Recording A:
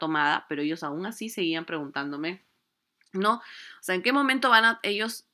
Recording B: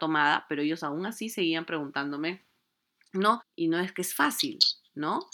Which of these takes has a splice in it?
B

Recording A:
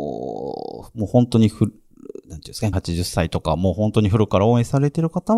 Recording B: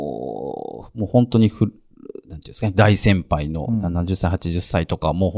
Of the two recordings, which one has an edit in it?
A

